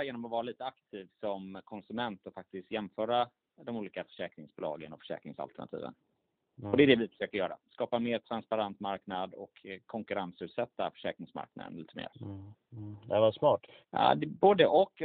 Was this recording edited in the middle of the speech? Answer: yes; 2 cuts; at 12.1 s, 13.9 s

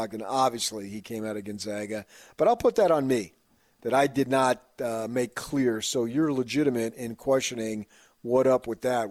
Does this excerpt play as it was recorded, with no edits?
yes; 0 cuts

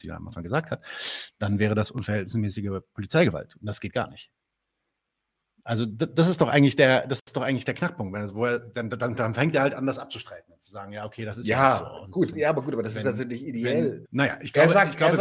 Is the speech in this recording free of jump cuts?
no; 2 cuts; at 12.3 s, 14.1 s

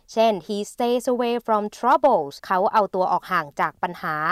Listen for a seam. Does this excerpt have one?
yes; 1 cut; at 2.4 s

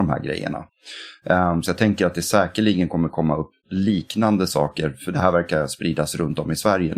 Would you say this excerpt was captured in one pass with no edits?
yes; 0 cuts

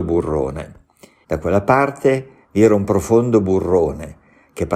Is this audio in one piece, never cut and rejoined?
no; 1 cut; at 1.2 s

